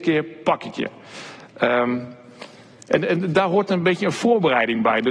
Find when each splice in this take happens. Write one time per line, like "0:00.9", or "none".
none